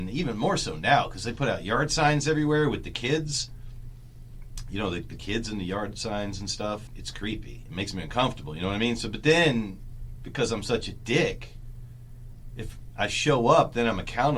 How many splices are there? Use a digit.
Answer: 1